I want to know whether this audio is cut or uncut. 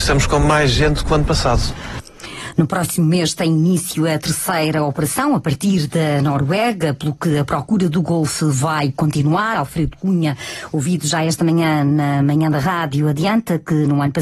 uncut